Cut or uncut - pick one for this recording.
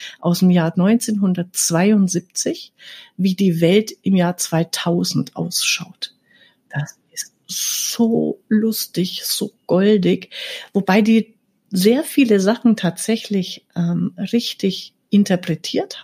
uncut